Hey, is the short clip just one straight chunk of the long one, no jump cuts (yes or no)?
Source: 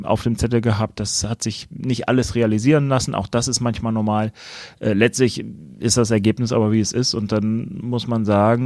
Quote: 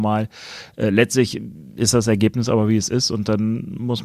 yes